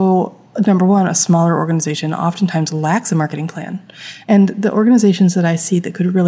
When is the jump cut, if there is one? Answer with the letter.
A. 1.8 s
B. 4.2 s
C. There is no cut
B